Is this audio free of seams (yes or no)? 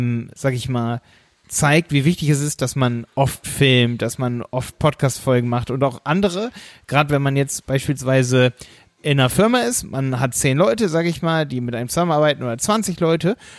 yes